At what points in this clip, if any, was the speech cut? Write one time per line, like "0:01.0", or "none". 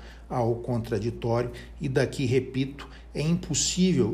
none